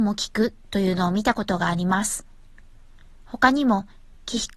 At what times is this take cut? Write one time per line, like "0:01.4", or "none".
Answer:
none